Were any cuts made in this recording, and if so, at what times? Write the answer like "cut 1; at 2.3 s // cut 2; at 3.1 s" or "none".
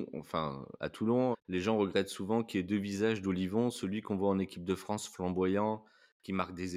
cut 1; at 1.3 s